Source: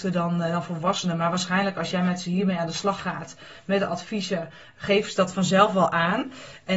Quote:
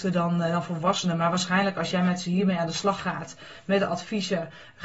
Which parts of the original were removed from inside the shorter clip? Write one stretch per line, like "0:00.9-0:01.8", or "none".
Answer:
none